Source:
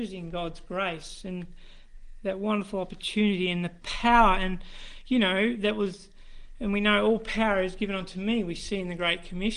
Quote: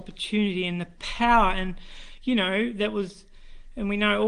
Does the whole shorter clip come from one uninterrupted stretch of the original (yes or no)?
yes